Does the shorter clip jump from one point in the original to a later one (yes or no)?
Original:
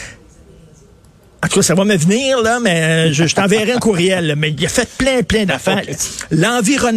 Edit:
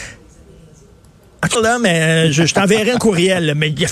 yes